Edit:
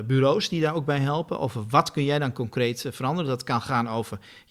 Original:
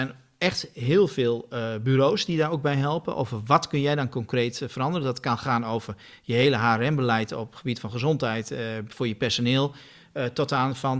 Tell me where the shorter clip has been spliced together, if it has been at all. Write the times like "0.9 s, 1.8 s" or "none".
none